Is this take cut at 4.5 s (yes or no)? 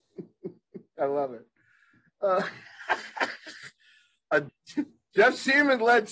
yes